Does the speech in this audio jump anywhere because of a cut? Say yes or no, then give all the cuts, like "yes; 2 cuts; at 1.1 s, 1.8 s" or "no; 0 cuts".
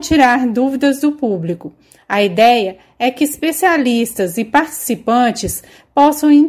no; 0 cuts